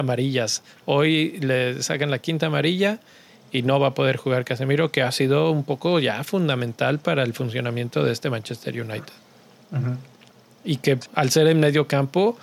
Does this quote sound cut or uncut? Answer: cut